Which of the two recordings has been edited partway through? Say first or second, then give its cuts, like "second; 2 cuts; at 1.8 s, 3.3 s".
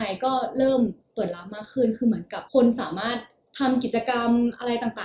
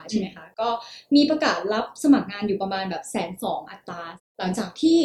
first; 1 cut; at 2.5 s